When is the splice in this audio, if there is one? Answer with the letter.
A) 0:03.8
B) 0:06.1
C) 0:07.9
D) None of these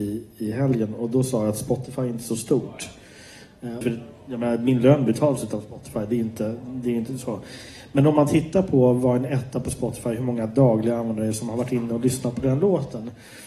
A